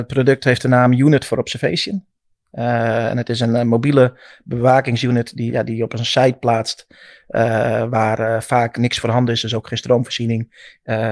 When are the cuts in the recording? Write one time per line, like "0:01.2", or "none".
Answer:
0:05.5

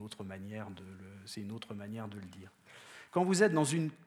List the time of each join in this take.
0:03.1

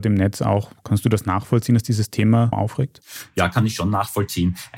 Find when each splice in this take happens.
0:02.5

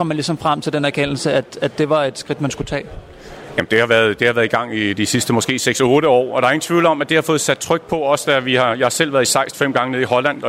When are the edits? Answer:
none

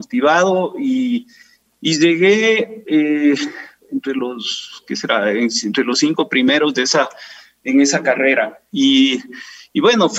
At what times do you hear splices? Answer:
0:03.8
0:08.7

